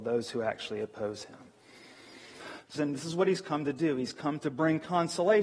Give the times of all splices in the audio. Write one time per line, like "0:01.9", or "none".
0:02.8